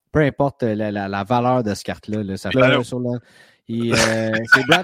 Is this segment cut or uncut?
cut